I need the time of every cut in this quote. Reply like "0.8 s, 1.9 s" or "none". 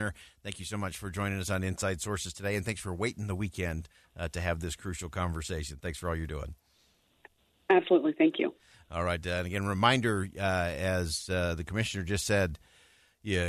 none